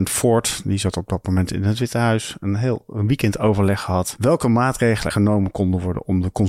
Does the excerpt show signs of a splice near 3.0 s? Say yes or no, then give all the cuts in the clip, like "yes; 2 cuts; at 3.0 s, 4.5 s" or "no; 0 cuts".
no; 1 cut; at 5.1 s